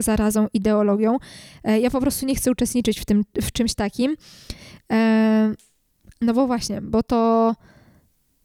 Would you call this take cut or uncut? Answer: uncut